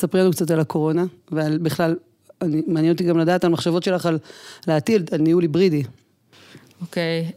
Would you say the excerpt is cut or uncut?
uncut